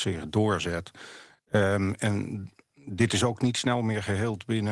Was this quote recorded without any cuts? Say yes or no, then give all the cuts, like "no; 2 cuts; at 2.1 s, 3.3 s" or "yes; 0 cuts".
yes; 0 cuts